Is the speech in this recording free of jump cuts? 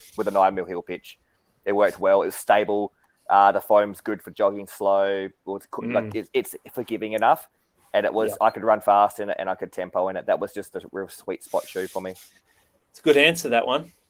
yes; 0 cuts

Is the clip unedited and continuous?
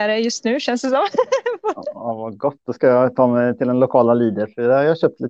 yes; 0 cuts

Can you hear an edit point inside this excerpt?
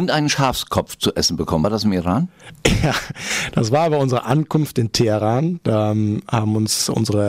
no; 0 cuts

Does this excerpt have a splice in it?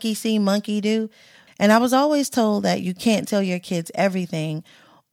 yes; 1 cut; at 1.5 s

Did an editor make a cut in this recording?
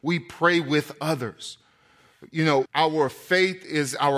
yes; 1 cut; at 2.7 s

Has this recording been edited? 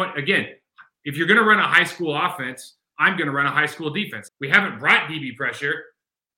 yes; 1 cut; at 4.3 s

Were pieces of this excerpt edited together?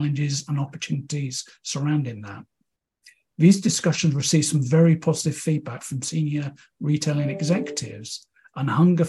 no; 0 cuts

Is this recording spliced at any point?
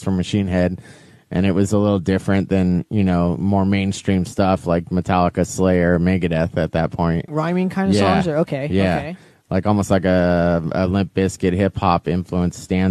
yes; 1 cut; at 7.3 s

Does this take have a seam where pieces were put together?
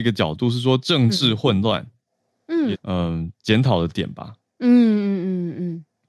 yes; 1 cut; at 2.7 s

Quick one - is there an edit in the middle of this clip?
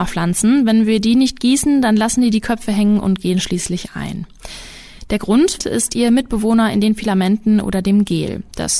yes; 1 cut; at 5.6 s

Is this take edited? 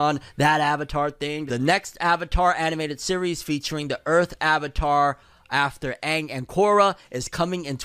yes; 1 cut; at 1.5 s

